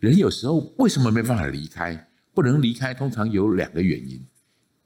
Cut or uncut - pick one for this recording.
uncut